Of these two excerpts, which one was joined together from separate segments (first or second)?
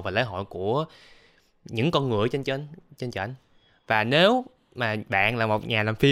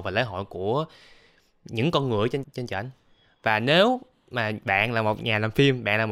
second